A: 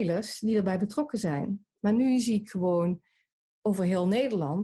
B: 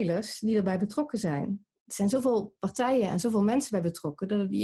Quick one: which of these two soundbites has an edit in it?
A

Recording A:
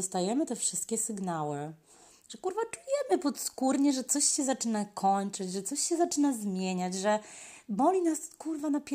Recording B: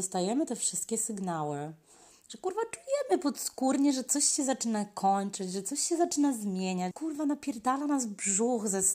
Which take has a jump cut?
B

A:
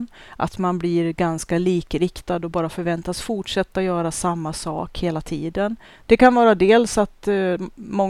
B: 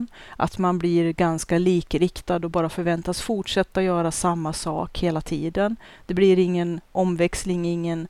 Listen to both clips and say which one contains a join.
A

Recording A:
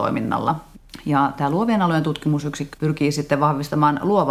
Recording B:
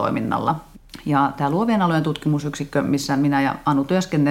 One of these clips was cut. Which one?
A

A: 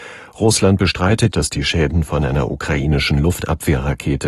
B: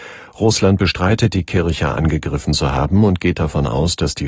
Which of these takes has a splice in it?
A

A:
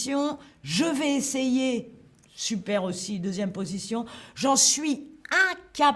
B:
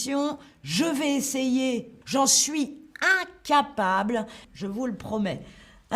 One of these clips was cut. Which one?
B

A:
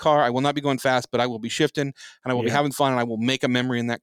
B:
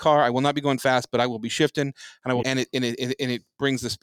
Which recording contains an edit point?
B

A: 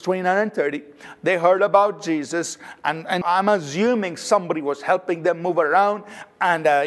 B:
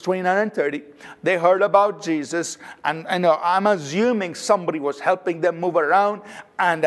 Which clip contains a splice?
A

